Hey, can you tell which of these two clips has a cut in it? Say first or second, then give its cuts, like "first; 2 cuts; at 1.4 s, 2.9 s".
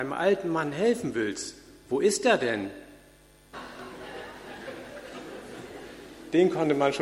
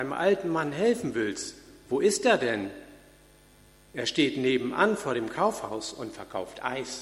first; 1 cut; at 3.5 s